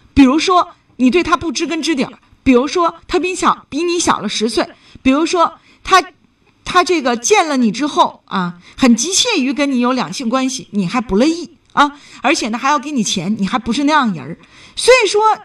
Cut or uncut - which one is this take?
uncut